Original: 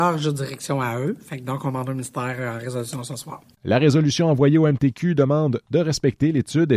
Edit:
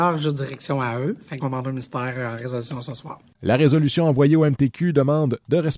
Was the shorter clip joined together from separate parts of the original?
yes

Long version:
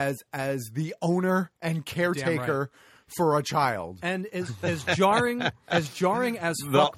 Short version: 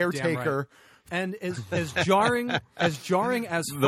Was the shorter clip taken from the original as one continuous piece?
no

